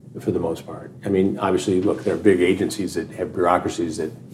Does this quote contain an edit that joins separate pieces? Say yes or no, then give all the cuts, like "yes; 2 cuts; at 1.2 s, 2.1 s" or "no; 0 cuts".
no; 0 cuts